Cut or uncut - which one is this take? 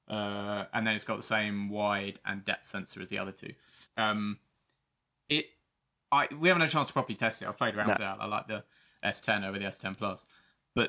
cut